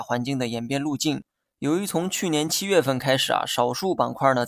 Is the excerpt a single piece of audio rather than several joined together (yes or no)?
yes